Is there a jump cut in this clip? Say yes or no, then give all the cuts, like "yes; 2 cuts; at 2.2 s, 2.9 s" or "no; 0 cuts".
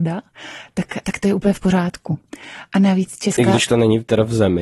yes; 1 cut; at 1.0 s